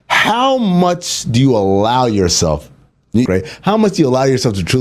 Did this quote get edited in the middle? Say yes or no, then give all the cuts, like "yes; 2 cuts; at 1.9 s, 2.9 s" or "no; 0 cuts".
yes; 1 cut; at 3.3 s